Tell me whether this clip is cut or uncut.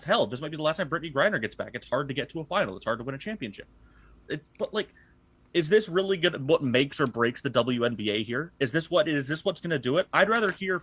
cut